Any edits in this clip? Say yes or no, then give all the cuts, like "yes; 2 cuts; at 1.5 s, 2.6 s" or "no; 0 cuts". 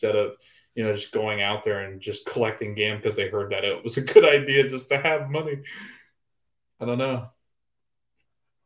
no; 0 cuts